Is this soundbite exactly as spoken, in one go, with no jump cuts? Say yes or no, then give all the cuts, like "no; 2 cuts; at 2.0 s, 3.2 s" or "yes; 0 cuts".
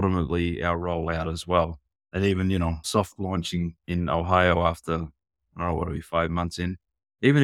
no; 1 cut; at 2.8 s